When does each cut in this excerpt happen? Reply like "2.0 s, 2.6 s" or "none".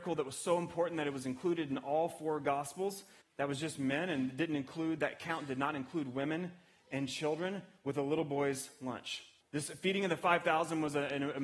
3.2 s, 9.4 s